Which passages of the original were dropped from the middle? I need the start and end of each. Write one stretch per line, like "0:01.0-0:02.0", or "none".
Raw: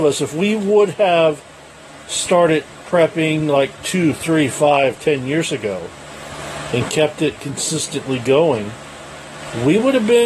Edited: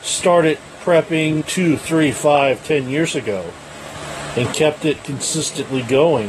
0:03.5-0:03.8